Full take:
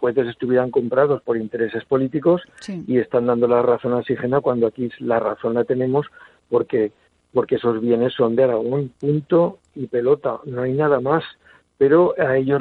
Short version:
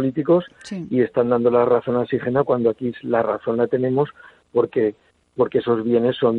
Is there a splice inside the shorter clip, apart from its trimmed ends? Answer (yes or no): no